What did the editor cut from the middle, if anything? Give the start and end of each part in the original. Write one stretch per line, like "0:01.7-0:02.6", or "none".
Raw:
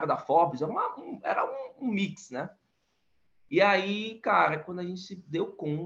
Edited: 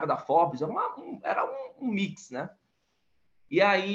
none